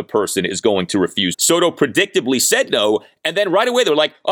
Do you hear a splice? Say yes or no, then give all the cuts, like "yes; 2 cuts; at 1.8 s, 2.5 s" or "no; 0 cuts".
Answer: yes; 1 cut; at 1.3 s